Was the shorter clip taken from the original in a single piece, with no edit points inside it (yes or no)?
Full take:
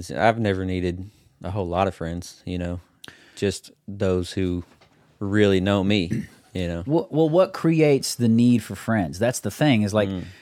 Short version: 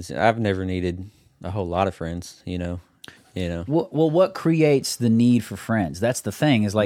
no